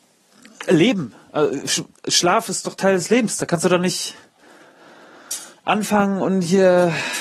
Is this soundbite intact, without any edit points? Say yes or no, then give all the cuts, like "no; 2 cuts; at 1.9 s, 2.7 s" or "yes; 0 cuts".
yes; 0 cuts